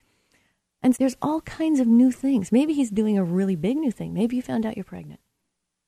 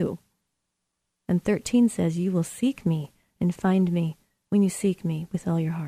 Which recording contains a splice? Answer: first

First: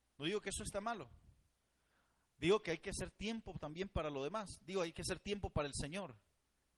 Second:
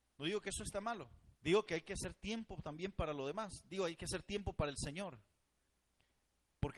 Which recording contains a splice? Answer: second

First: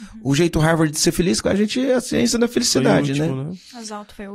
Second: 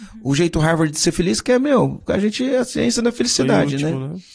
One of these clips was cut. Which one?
first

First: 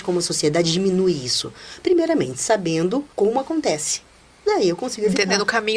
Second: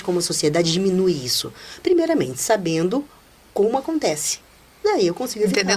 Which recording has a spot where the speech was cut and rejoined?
first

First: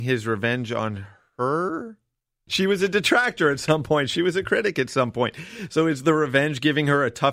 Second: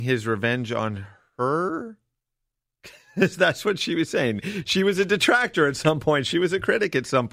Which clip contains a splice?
first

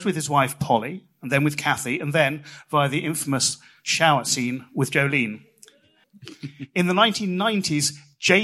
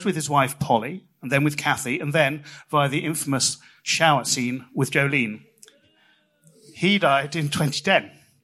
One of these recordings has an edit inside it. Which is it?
first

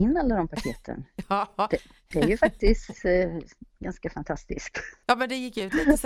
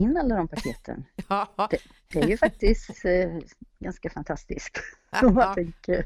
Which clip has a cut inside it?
first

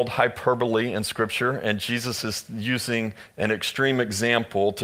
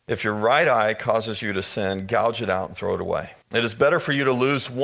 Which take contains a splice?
second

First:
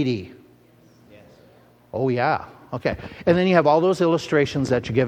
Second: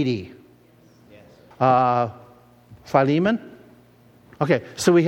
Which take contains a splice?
second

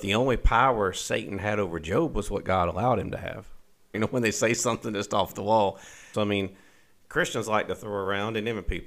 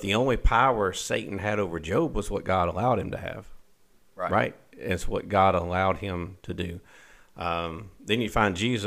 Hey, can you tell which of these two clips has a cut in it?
first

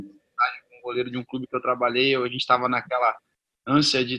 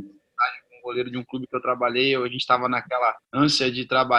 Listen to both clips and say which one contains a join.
second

